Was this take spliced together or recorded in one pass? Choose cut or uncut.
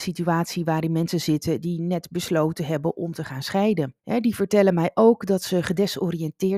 cut